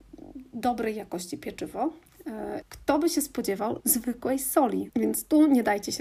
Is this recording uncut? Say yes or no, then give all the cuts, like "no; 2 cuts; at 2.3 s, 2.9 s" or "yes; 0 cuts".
no; 3 cuts; at 2.6 s, 3.8 s, 4.9 s